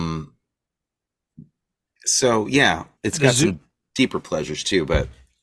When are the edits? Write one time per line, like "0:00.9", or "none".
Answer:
0:03.0